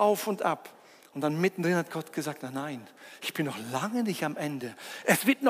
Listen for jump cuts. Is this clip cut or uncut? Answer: uncut